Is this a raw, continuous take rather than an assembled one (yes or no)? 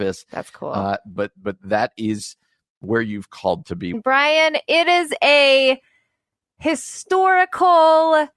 no